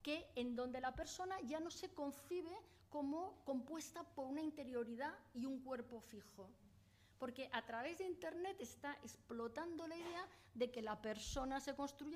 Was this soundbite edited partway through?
no; 0 cuts

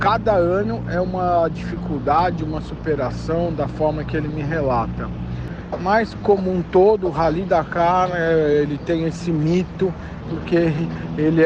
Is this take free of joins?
no; 1 cut; at 10.2 s

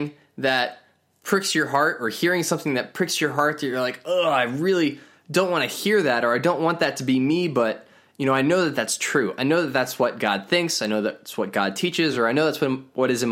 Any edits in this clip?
no; 0 cuts

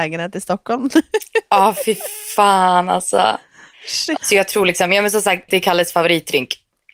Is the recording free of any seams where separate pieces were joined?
no; 2 cuts; at 4.2 s, 5.5 s

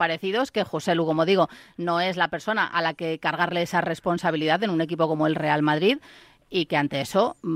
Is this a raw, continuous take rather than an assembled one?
yes; 0 cuts

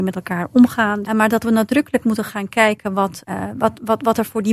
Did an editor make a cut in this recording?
yes; 2 cuts; at 1.1 s, 3.2 s

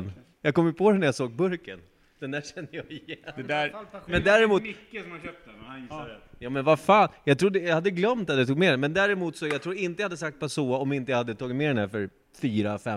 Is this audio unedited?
yes; 0 cuts

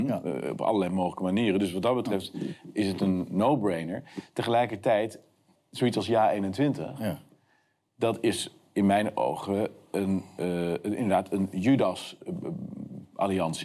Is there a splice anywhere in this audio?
yes; 1 cut; at 5.6 s

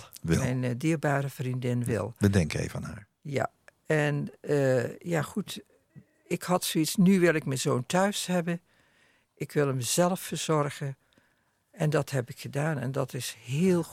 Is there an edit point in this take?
no; 0 cuts

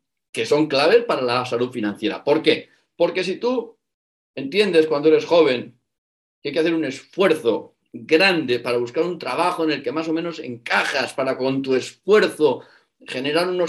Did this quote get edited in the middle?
no; 0 cuts

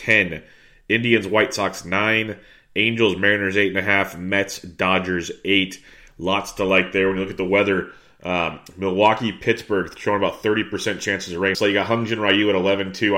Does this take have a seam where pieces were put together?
yes; 1 cut; at 11.5 s

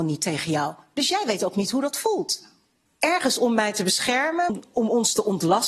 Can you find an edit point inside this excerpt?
yes; 2 cuts; at 2.9 s, 4.5 s

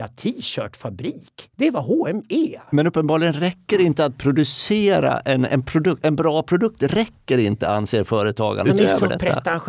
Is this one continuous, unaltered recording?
no; 2 cuts; at 5.5 s, 8.6 s

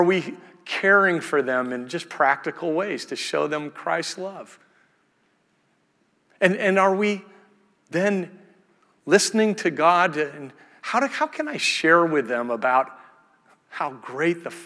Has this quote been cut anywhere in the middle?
no; 0 cuts

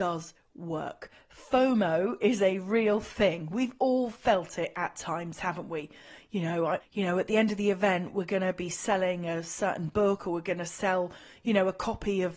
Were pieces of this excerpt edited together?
yes; 1 cut; at 6.8 s

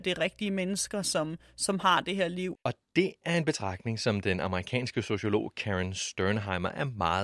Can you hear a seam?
yes; 1 cut; at 2.5 s

